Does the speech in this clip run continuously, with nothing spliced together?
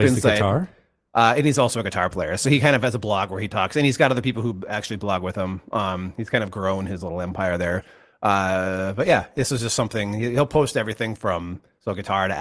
yes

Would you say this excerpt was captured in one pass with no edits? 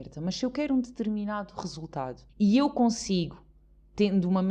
no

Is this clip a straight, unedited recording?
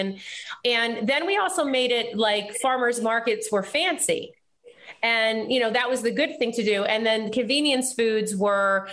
yes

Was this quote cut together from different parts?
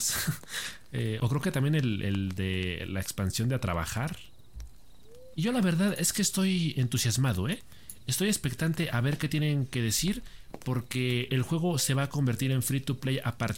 yes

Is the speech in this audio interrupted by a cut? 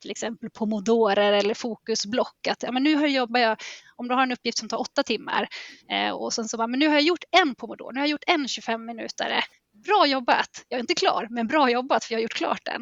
no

